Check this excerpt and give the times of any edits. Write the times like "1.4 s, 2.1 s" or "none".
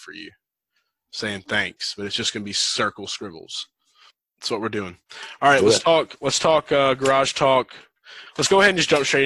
none